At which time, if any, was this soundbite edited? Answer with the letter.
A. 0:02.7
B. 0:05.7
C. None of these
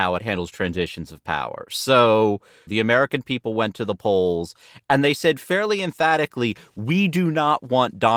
A